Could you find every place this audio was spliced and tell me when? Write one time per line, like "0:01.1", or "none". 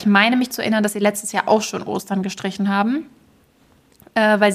none